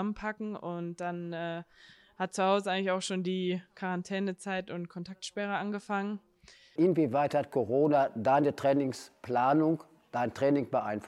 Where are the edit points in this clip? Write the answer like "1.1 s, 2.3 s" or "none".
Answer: 6.8 s